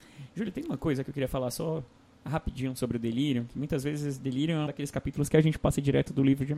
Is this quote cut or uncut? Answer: cut